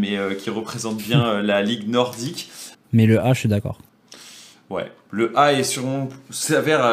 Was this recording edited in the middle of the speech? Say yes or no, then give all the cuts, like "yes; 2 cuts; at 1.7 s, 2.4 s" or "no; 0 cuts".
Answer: yes; 1 cut; at 2.7 s